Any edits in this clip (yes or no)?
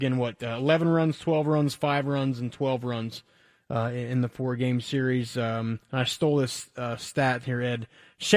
no